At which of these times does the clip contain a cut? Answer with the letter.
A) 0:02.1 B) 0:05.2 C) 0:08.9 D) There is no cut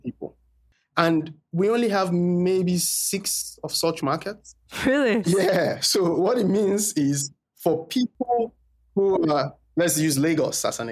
B